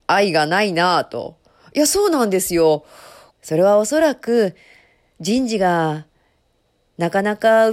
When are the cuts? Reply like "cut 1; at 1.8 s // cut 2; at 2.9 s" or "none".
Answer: cut 1; at 3.3 s